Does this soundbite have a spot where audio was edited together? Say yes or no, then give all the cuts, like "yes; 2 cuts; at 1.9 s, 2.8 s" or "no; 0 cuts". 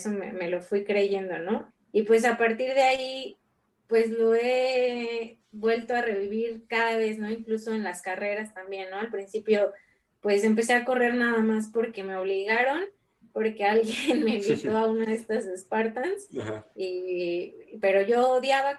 no; 0 cuts